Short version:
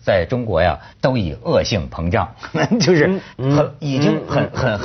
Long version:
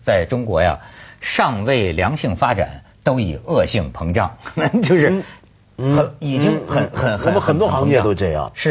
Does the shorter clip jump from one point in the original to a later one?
yes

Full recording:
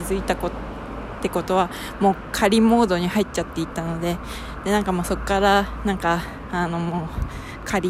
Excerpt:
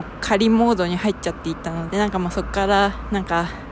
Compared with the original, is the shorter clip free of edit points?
no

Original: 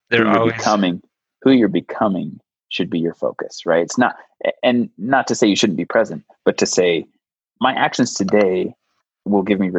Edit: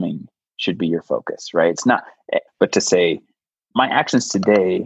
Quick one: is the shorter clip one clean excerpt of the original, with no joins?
no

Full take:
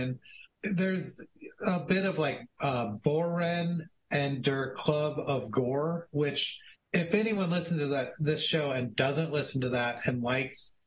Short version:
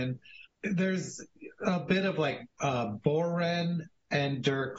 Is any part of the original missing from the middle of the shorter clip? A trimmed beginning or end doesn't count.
no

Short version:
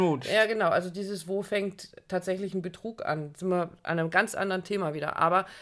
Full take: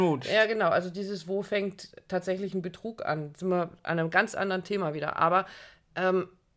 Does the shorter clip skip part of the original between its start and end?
no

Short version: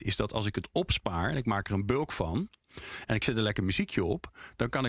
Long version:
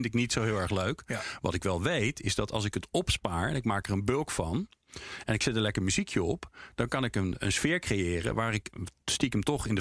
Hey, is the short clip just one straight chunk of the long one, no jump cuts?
yes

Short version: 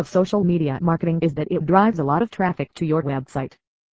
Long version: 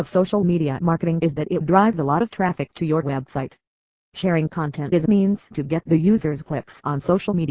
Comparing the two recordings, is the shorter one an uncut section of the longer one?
yes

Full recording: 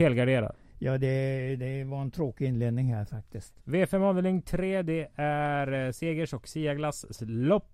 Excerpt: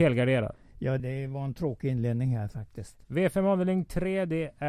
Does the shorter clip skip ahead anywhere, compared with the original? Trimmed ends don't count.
yes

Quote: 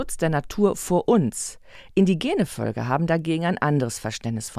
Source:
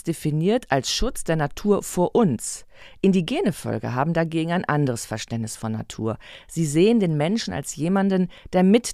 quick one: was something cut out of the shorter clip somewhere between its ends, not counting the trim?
no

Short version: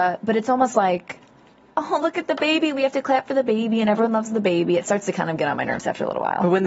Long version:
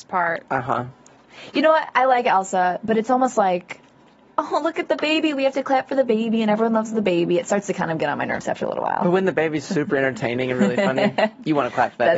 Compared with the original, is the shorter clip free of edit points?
yes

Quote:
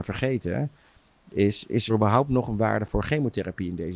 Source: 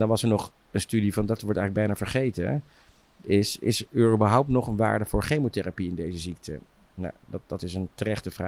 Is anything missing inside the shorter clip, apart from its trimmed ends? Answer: yes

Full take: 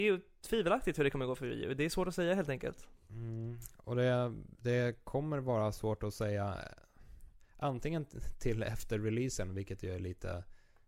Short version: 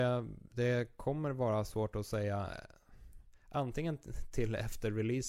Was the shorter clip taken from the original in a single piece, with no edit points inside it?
yes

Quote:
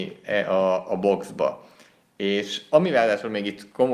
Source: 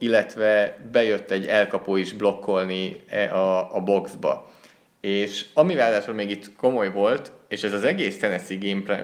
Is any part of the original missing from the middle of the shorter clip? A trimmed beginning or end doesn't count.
no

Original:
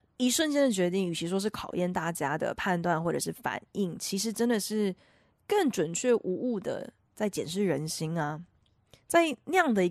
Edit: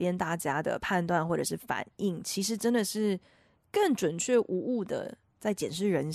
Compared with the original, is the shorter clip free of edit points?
yes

